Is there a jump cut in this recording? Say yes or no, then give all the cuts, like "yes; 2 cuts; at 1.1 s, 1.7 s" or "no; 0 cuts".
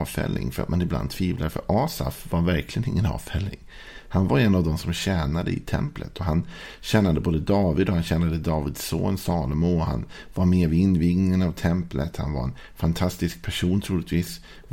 no; 0 cuts